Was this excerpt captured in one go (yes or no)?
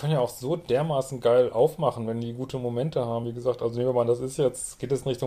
yes